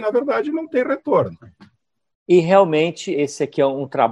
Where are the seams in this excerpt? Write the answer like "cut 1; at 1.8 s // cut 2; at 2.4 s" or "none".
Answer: cut 1; at 2.1 s // cut 2; at 3.1 s